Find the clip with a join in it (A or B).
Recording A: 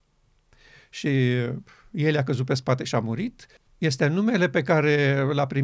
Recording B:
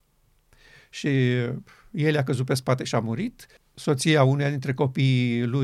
A